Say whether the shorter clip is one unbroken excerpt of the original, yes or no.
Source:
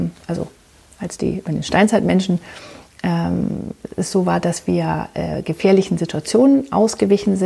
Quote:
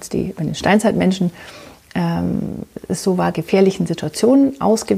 no